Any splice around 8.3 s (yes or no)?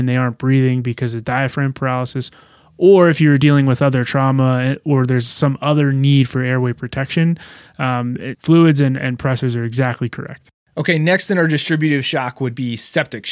yes